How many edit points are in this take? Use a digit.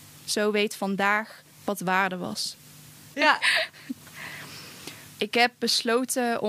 2